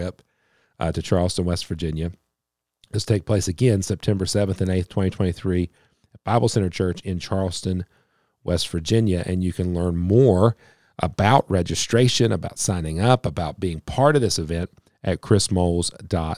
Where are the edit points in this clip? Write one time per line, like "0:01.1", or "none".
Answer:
none